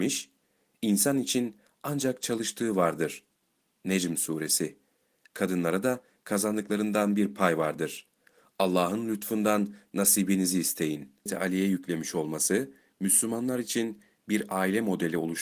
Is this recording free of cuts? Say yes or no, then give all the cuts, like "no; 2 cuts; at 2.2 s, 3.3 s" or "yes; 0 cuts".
no; 2 cuts; at 5.3 s, 11.3 s